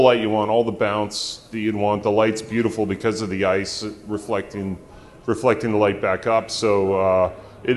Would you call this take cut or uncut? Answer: uncut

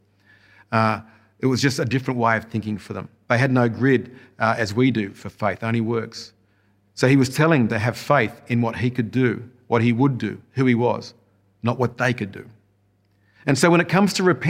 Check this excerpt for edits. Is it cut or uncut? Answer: uncut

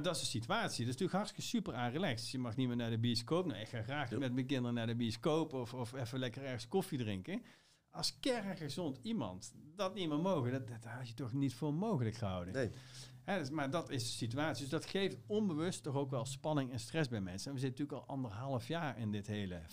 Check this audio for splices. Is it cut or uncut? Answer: cut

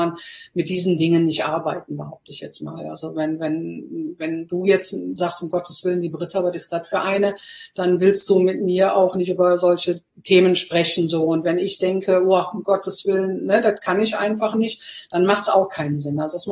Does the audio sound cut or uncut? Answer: uncut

